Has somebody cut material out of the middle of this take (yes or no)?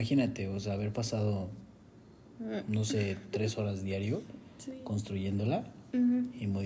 no